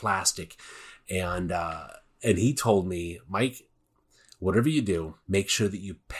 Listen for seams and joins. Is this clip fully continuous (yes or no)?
no